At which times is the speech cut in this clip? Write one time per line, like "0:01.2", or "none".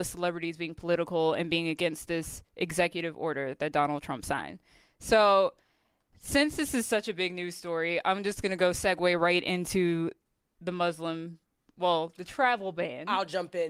none